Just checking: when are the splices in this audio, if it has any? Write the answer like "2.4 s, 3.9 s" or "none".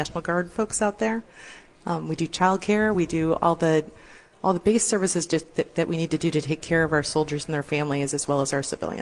none

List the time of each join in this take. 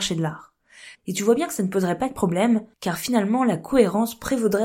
1.0 s, 2.7 s

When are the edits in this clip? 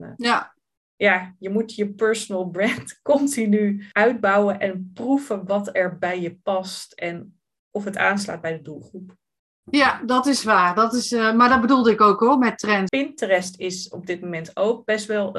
12.9 s

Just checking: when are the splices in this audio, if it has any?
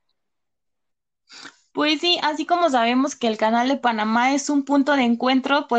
none

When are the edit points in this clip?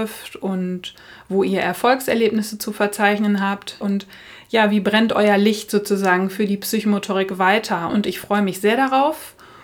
3.8 s, 7.9 s

